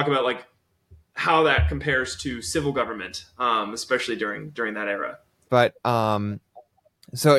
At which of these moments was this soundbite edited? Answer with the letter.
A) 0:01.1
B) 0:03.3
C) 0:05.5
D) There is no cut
C